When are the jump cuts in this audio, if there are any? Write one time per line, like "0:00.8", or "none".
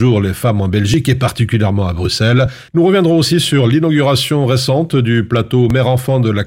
0:02.7